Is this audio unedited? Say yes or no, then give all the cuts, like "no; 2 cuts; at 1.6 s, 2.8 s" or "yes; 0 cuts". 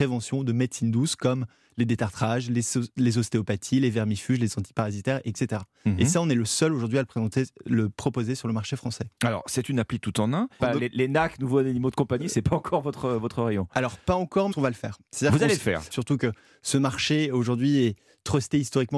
no; 3 cuts; at 10.6 s, 14.5 s, 15.9 s